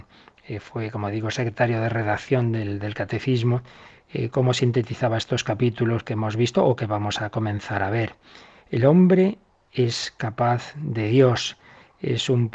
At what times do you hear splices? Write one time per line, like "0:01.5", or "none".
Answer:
none